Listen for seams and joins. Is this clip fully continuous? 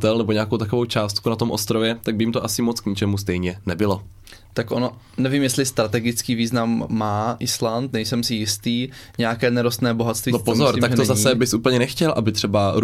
yes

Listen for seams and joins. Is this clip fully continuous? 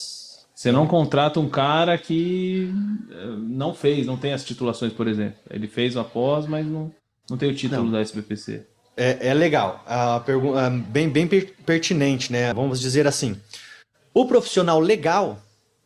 no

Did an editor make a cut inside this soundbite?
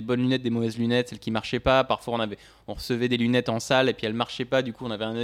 no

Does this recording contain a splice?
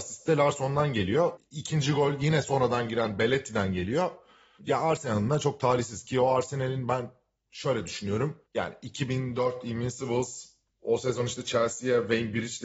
yes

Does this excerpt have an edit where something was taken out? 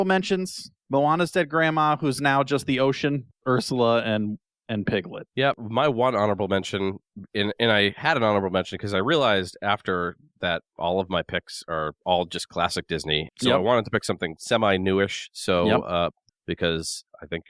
yes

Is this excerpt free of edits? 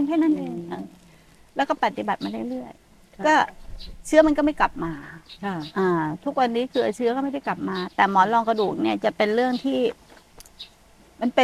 no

